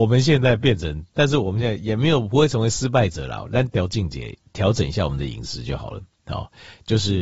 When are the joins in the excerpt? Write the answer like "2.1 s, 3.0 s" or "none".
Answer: none